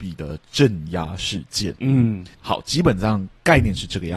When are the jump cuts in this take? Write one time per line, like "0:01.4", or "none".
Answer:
0:02.3